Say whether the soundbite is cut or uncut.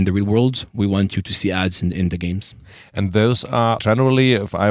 cut